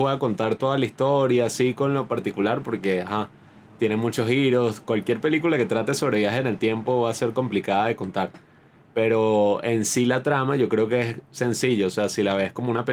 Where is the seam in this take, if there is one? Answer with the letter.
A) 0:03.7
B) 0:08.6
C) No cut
C